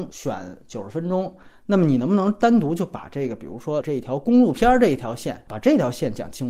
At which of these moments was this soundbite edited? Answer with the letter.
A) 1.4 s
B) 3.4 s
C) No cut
C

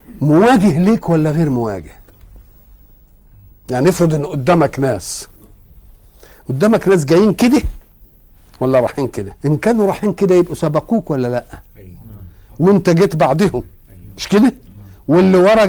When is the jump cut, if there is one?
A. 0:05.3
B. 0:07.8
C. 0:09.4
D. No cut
C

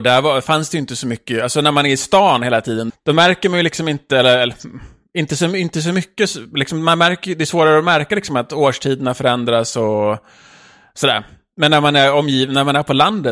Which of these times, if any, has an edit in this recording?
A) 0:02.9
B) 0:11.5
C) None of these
A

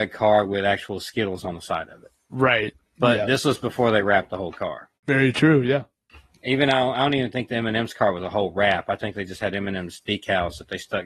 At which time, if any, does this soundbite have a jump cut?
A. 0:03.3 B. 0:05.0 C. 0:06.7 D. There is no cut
B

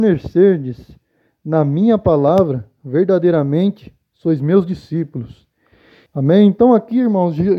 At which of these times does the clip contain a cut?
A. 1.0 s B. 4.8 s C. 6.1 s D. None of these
C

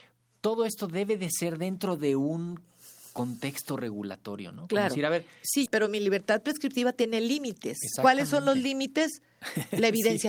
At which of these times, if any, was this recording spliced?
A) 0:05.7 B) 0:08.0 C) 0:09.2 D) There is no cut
A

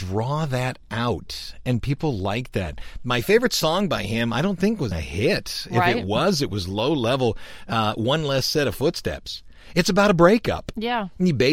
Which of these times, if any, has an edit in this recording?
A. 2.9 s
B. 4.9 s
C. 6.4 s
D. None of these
B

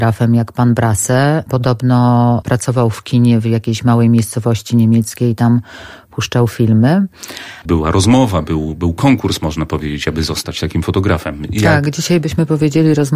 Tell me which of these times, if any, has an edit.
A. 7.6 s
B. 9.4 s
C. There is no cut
A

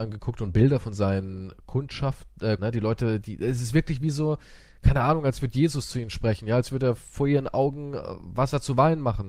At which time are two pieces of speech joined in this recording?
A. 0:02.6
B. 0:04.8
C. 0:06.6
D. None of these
A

